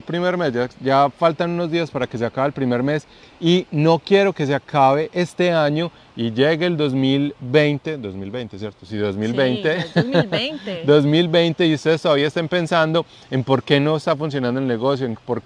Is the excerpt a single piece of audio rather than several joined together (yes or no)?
yes